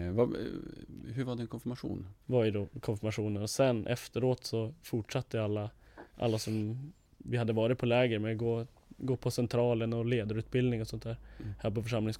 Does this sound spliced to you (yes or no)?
yes